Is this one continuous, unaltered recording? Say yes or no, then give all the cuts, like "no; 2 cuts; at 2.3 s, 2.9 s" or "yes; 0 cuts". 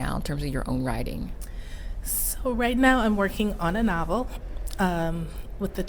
yes; 0 cuts